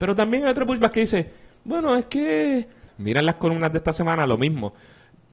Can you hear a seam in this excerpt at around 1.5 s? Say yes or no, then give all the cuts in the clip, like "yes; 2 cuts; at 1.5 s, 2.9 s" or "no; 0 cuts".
no; 1 cut; at 2.9 s